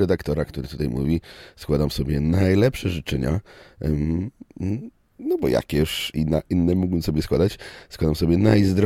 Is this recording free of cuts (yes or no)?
yes